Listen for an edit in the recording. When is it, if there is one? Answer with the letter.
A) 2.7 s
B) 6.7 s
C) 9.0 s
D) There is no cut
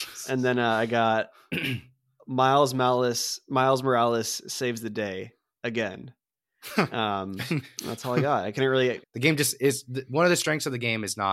C